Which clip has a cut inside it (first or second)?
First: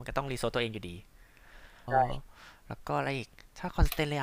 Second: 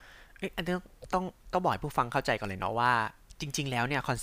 first